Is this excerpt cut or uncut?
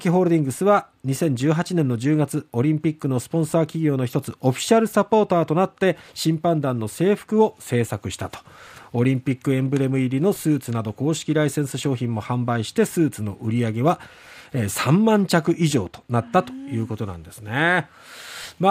uncut